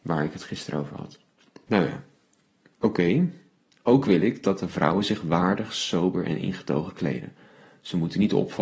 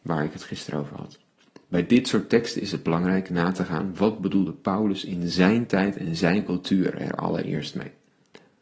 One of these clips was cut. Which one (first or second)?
first